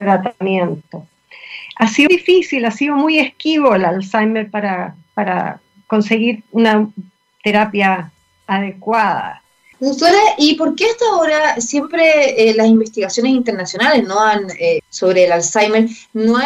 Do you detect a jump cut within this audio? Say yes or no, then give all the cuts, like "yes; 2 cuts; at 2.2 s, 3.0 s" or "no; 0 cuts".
yes; 3 cuts; at 2.1 s, 9.7 s, 14.8 s